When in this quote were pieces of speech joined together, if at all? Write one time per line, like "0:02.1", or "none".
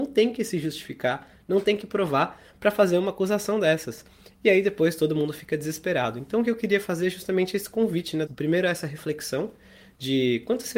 0:08.3